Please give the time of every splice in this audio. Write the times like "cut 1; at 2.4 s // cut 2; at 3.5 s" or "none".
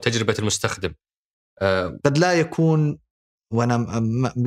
cut 1; at 2.0 s